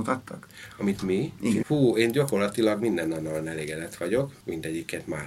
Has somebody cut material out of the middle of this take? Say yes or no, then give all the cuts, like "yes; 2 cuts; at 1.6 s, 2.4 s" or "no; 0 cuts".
yes; 1 cut; at 1.6 s